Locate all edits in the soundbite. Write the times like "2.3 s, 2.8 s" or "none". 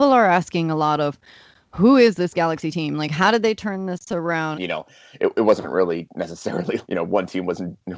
4.5 s, 6.8 s